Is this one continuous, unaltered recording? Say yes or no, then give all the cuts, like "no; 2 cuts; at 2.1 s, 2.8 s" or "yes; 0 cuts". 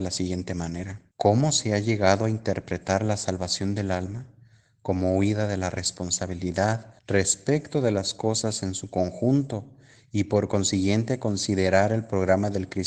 no; 2 cuts; at 1.1 s, 7.0 s